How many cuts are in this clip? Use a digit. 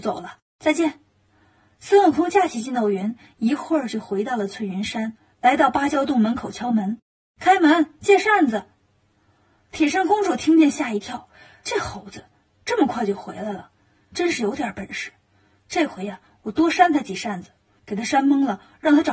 0